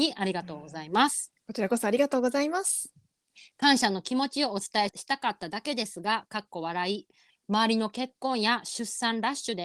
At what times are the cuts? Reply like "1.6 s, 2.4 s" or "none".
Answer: 4.9 s, 7.3 s